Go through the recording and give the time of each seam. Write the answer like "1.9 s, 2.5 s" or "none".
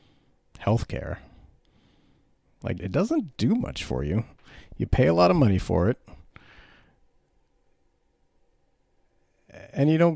2.8 s